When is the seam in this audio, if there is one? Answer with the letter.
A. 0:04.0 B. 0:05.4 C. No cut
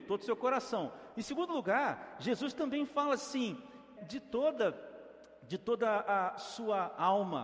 A